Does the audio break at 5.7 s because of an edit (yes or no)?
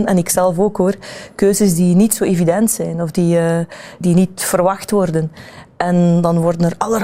no